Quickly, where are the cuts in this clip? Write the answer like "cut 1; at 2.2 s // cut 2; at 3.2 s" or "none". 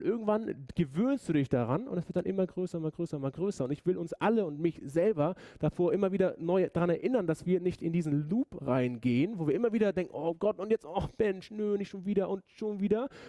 none